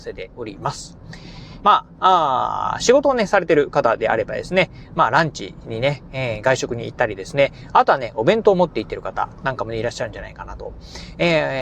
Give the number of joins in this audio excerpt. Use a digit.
1